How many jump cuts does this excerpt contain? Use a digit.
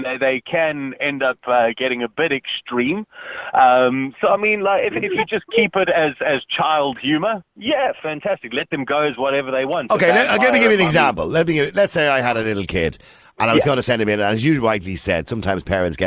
0